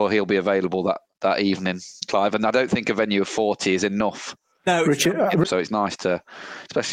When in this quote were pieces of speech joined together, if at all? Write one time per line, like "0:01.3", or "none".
0:05.4